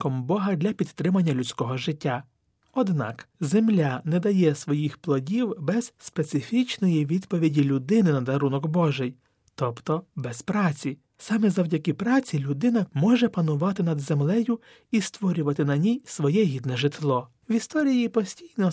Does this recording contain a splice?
yes; 2 cuts; at 12.9 s, 17.4 s

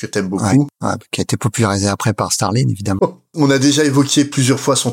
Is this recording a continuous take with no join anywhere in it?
no; 1 cut; at 3.0 s

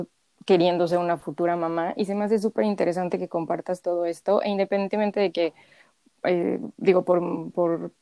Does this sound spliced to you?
no; 0 cuts

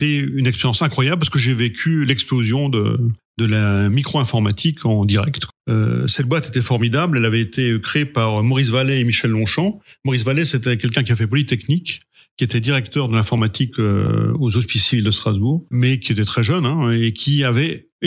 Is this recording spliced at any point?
yes; 1 cut; at 15.7 s

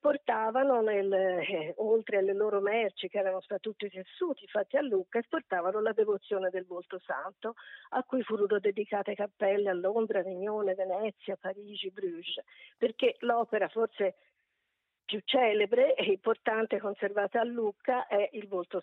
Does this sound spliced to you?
no; 0 cuts

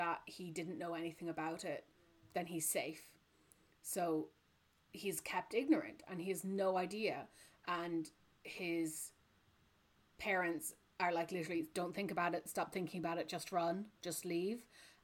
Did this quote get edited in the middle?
no; 0 cuts

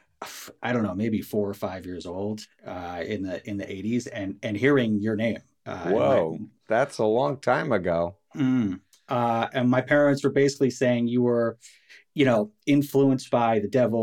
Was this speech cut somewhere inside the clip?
no; 0 cuts

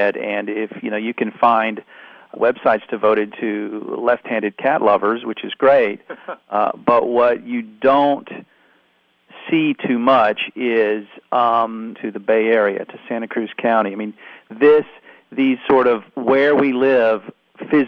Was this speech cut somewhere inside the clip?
yes; 2 cuts; at 2.4 s, 11.9 s

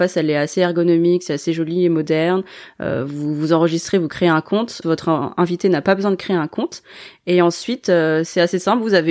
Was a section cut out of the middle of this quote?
yes; 1 cut; at 4.8 s

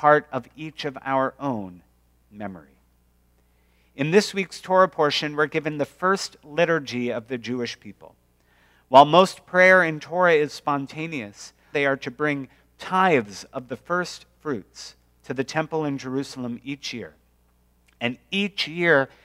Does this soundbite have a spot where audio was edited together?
yes; 1 cut; at 11.7 s

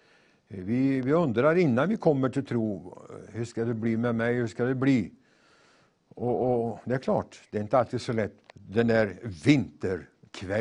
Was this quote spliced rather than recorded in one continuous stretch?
yes; 1 cut; at 8.5 s

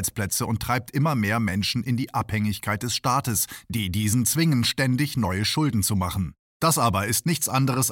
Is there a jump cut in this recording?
yes; 1 cut; at 6.5 s

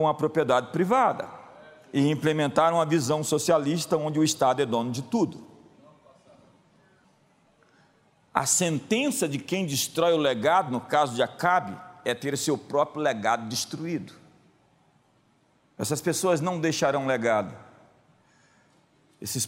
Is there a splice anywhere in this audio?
no; 0 cuts

